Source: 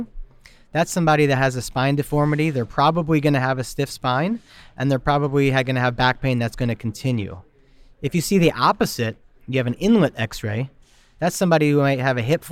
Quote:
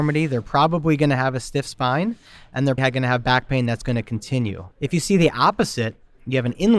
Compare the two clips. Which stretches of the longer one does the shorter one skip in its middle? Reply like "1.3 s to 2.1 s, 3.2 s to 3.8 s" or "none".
5.0 s to 5.5 s, 7.4 s to 7.9 s